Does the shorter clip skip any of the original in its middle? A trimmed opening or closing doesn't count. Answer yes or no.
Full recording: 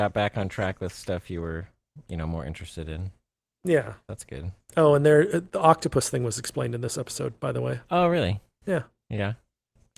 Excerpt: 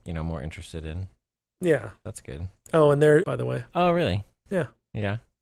yes